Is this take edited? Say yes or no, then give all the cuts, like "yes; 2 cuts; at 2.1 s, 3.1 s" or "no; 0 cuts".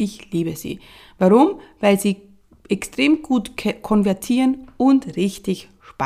no; 0 cuts